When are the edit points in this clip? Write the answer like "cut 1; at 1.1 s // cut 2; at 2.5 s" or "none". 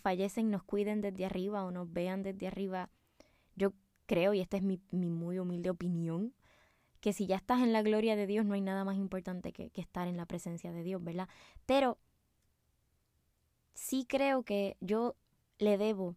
none